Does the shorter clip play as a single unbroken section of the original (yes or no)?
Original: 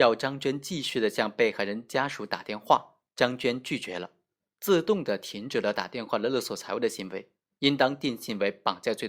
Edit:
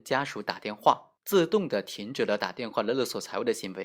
no